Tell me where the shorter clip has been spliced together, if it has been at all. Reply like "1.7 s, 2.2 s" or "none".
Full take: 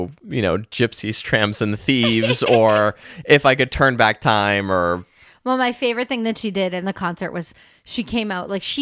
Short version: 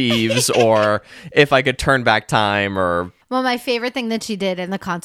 3.2 s